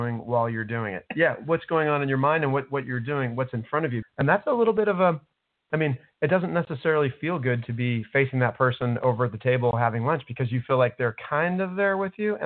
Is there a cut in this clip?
yes; 2 cuts; at 1.1 s, 4.0 s

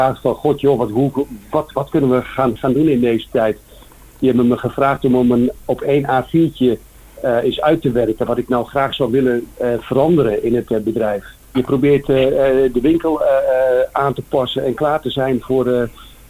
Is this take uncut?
no; 1 cut; at 11.5 s

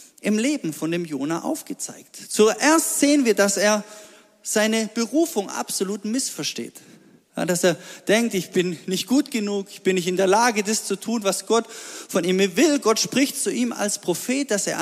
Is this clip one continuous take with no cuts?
yes; 0 cuts

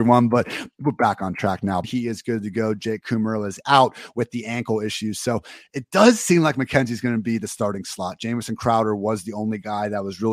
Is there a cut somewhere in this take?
yes; 1 cut; at 1.8 s

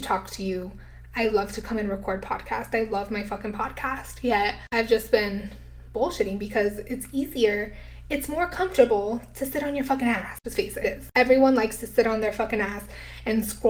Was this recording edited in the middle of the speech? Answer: yes; 1 cut; at 10.8 s

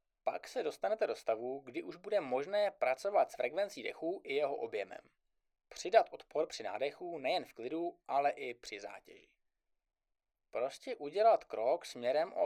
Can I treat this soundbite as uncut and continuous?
yes; 0 cuts

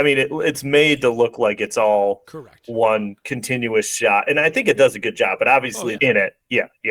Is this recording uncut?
no; 1 cut; at 6.0 s

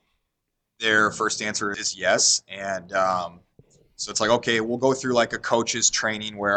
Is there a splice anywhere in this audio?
yes; 1 cut; at 1.7 s

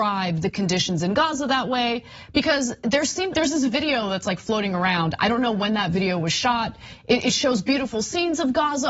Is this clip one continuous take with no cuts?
no; 1 cut; at 3.3 s

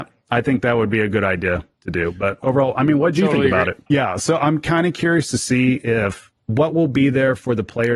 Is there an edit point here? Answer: yes; 2 cuts; at 3.9 s, 6.4 s

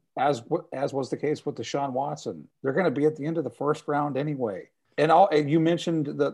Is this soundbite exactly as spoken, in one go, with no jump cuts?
no; 2 cuts; at 2.5 s, 4.8 s

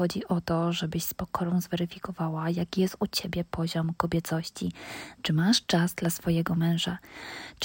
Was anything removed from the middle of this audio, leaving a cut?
yes; 1 cut; at 5.1 s

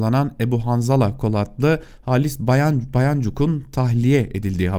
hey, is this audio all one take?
yes; 0 cuts

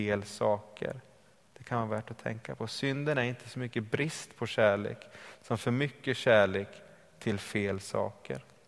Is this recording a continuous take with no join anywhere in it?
yes; 0 cuts

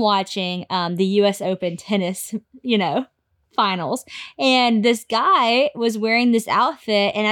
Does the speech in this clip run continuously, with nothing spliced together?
yes; 0 cuts

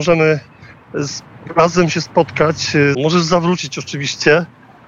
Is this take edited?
yes; 1 cut; at 2.9 s

